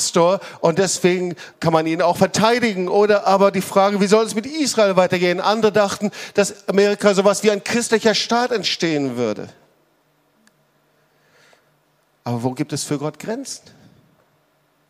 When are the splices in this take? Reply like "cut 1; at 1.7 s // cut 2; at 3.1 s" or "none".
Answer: cut 1; at 1.5 s